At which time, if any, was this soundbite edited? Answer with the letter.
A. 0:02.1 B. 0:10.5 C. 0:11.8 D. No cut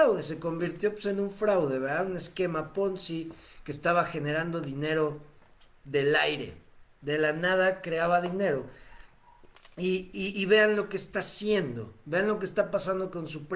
D